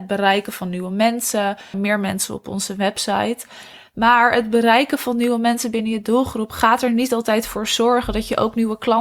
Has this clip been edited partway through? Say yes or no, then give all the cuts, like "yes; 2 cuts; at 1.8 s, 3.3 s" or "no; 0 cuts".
yes; 1 cut; at 1.7 s